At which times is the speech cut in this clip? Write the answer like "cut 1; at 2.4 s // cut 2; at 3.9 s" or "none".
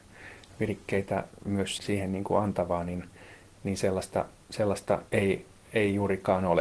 cut 1; at 1.8 s // cut 2; at 5.1 s